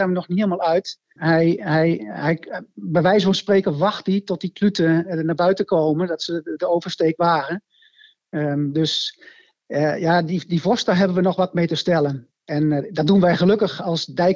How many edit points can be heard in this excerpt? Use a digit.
1